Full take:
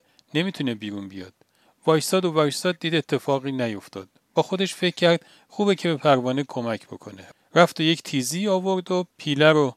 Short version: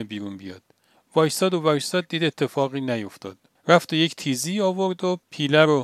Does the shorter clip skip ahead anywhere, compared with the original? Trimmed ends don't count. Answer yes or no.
yes